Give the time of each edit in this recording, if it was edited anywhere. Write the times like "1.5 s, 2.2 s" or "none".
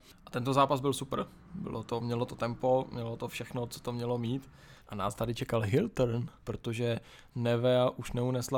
4.8 s, 6.4 s